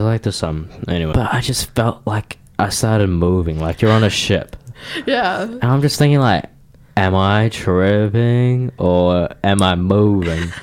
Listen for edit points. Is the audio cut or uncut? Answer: cut